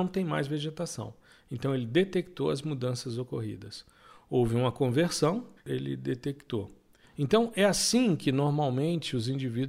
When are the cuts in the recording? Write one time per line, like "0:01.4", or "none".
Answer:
0:05.6
0:07.0